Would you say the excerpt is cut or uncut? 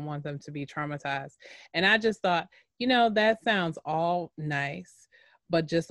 uncut